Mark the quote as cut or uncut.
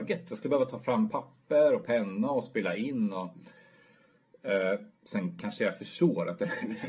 uncut